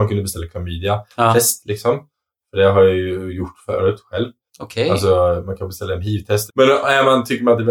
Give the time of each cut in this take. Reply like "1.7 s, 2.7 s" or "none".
4.5 s, 6.5 s

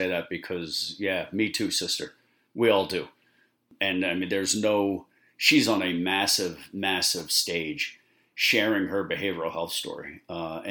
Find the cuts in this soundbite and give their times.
none

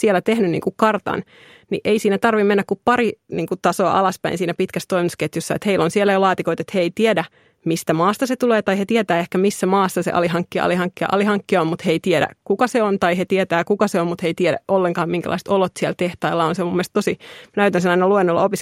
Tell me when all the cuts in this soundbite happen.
none

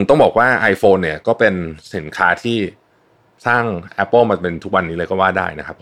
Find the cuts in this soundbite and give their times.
none

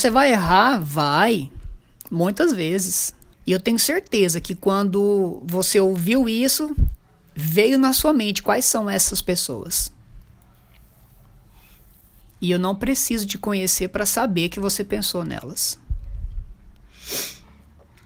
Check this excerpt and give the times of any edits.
3.3 s

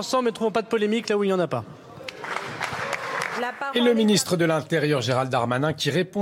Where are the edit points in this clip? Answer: 3.4 s

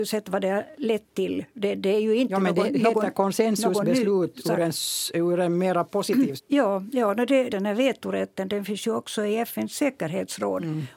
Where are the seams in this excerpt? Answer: 6.4 s, 7.5 s

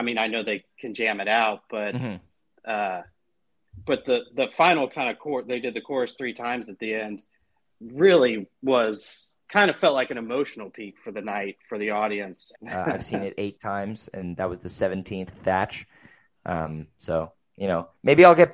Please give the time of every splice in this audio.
12.5 s

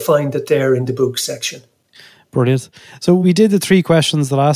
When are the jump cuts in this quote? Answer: none

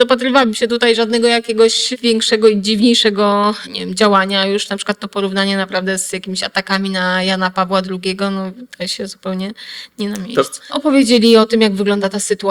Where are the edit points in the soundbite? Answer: 10.6 s

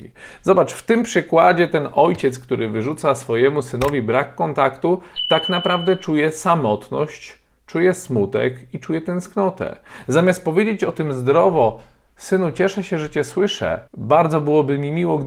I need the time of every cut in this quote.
13.9 s

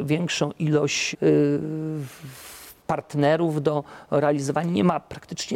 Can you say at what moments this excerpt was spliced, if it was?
1.1 s, 2.8 s

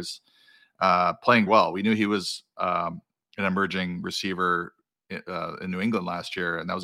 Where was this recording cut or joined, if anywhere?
1.5 s

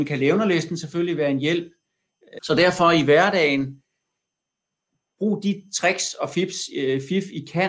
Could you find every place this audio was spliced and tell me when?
2.4 s

